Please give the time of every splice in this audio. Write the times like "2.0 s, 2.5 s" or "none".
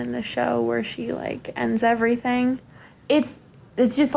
none